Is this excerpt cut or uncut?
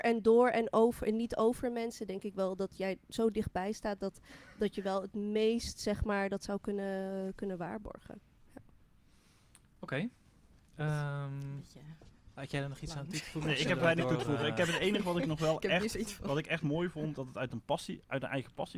cut